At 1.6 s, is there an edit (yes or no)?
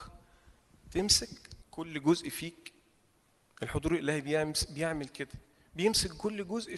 yes